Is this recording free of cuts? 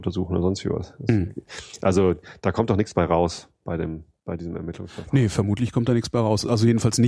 yes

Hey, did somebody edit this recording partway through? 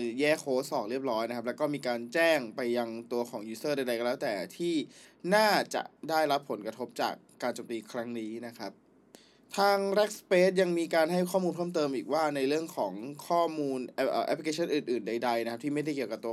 no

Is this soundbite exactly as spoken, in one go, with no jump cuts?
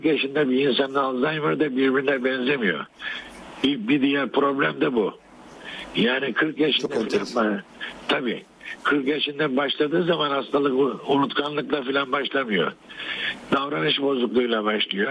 yes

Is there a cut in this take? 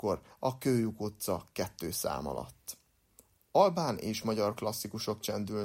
no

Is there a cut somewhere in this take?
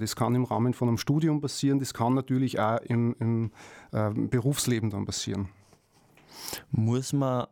no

